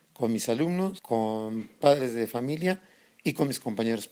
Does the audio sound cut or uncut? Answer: uncut